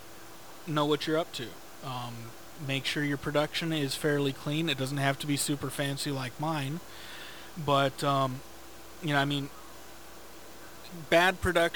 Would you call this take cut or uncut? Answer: uncut